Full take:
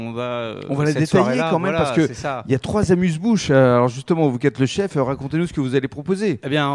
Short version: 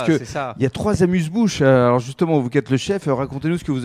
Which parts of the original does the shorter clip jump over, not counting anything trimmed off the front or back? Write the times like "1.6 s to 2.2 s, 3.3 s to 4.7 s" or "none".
none